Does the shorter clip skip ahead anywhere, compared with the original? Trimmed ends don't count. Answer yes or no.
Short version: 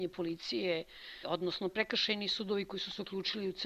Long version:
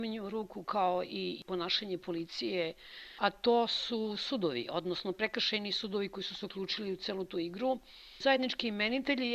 yes